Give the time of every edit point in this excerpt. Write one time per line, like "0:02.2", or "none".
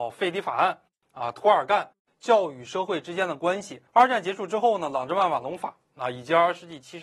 0:03.9